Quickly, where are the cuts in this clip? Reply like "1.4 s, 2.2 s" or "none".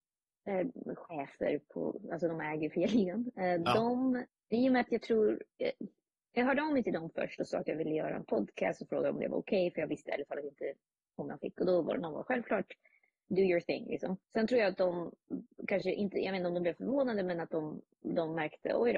14.2 s